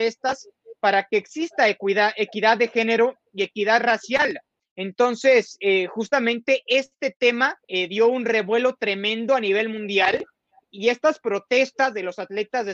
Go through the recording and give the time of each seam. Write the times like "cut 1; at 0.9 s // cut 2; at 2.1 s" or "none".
cut 1; at 4.6 s // cut 2; at 7.6 s